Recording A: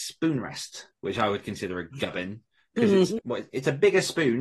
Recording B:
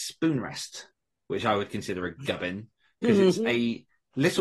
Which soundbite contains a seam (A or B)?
A